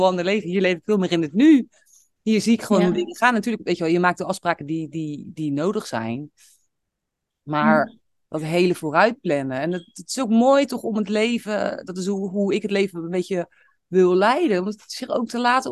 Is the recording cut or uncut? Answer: uncut